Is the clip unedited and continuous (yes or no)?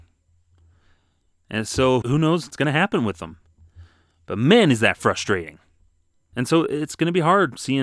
no